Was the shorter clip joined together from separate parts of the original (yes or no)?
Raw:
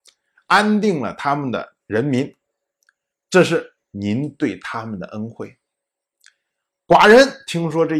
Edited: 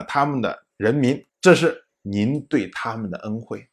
yes